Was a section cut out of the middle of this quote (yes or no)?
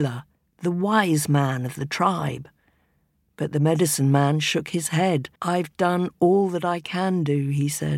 yes